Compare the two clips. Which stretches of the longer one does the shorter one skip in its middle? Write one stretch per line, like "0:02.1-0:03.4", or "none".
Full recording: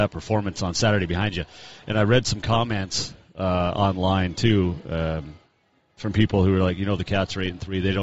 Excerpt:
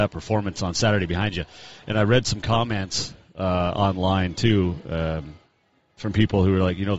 none